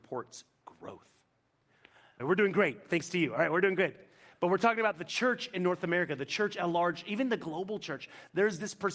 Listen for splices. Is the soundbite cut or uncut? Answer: cut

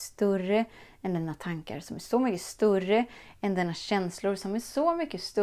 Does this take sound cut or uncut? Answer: uncut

